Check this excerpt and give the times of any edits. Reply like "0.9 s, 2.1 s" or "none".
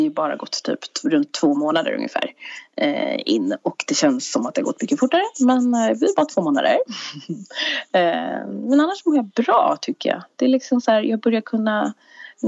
none